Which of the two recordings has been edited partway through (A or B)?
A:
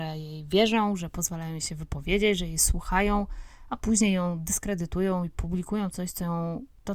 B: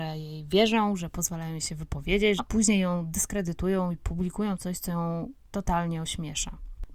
B